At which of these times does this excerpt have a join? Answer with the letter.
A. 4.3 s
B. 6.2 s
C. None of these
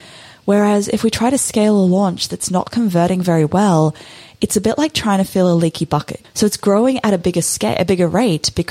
B